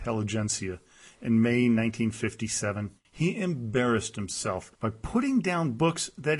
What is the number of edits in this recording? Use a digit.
2